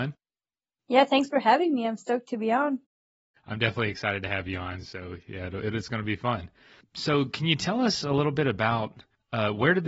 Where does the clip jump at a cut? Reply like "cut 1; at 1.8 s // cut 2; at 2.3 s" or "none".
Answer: none